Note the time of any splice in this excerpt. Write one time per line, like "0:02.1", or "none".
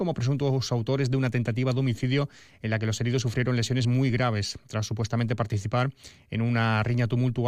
none